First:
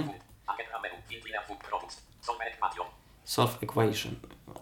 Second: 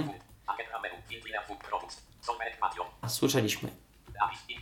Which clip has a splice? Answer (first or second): second